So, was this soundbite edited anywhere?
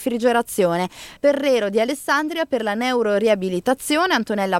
yes; 1 cut; at 1.2 s

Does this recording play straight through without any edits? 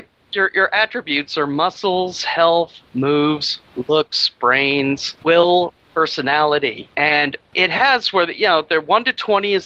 yes; 0 cuts

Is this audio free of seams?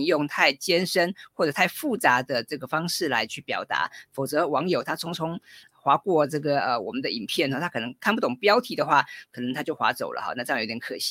yes; 0 cuts

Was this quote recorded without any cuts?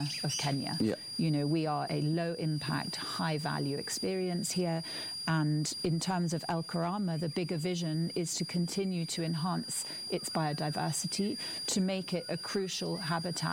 no; 1 cut; at 1.9 s

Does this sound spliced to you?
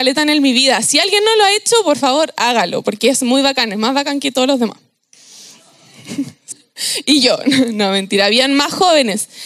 yes; 1 cut; at 6.5 s

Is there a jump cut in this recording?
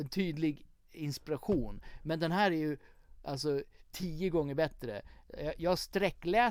no; 0 cuts

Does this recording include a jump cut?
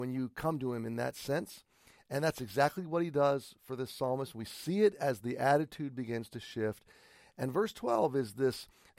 no; 0 cuts

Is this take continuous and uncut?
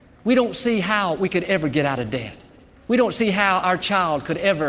yes; 0 cuts

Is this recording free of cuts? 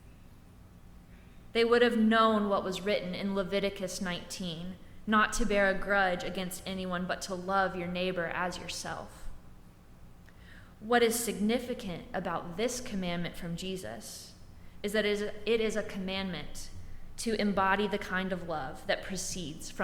yes; 0 cuts

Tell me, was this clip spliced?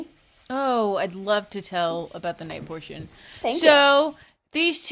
no; 0 cuts

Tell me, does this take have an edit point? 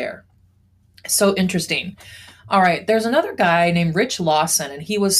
no; 0 cuts

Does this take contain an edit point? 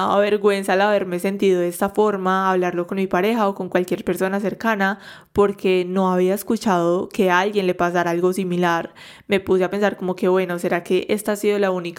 no; 0 cuts

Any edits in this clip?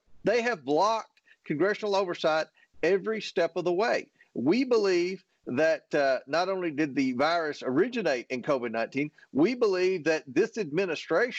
no; 0 cuts

